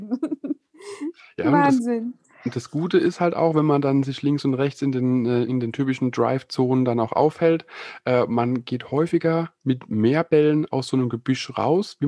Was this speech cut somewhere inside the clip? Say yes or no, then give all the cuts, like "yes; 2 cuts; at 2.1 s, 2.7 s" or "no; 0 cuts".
yes; 1 cut; at 5.5 s